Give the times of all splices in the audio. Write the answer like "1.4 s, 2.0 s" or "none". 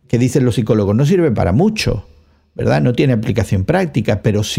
none

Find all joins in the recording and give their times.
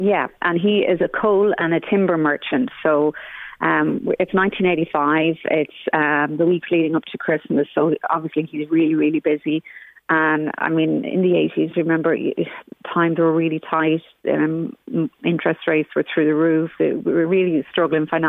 none

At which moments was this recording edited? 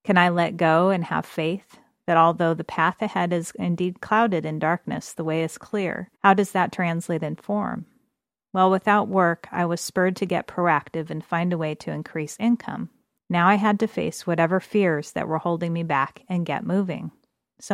6.1 s, 13.2 s

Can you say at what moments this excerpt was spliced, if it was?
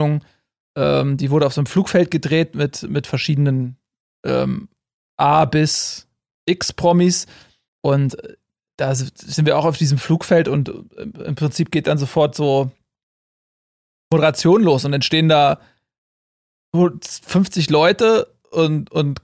7.7 s

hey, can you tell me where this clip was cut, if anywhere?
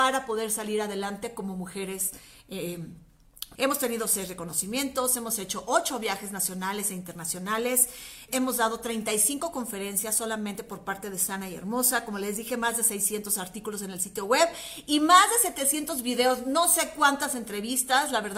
3.6 s, 8.3 s

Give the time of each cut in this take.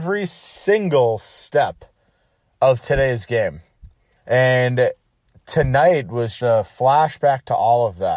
4.2 s, 6.4 s

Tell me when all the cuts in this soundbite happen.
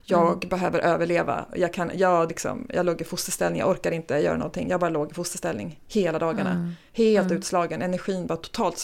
2.3 s

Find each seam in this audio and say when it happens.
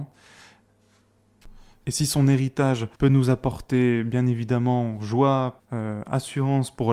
1.8 s, 2.9 s, 5.6 s

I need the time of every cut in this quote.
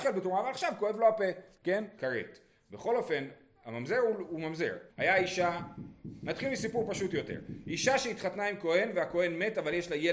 2.0 s, 4.9 s

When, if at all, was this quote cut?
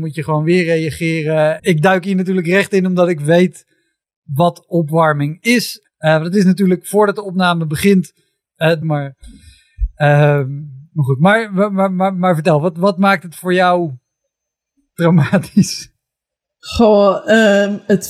1.6 s, 5.8 s, 8.8 s

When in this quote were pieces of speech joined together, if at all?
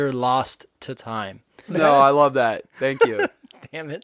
1.7 s

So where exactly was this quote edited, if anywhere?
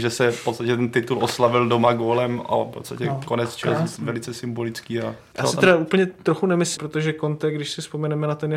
4.0 s, 5.3 s, 6.8 s

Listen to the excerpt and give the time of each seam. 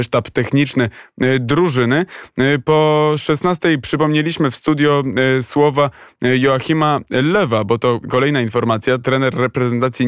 none

